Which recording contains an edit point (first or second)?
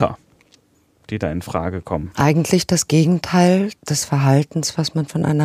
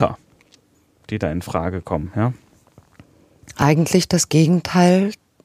first